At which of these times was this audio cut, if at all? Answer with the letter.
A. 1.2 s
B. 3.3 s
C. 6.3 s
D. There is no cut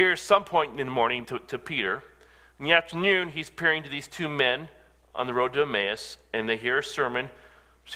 A